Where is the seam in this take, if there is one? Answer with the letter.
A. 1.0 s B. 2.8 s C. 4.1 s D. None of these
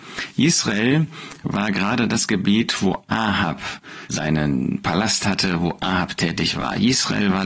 C